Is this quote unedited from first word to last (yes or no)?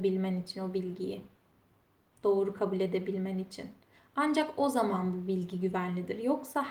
yes